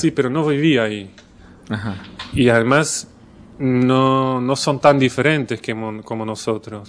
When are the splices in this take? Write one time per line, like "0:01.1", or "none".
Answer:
none